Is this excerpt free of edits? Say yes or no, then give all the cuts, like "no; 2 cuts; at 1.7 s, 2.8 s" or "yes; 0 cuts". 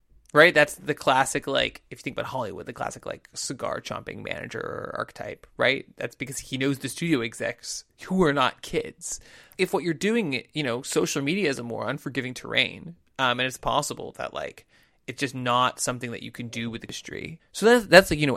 yes; 0 cuts